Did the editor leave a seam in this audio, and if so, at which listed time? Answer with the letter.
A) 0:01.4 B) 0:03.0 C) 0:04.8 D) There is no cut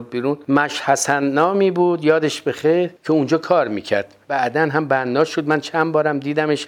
B